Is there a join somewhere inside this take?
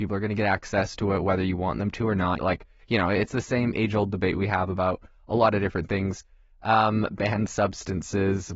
yes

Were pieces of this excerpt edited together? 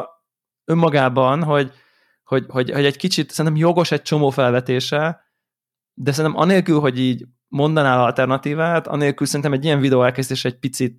no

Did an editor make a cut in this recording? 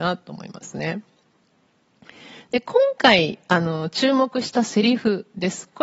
no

